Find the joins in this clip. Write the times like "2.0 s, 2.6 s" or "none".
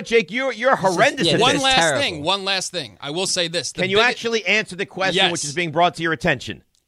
none